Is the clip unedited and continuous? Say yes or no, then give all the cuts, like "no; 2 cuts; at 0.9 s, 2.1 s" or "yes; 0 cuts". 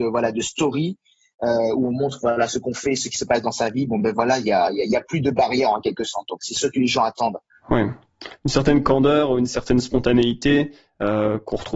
yes; 0 cuts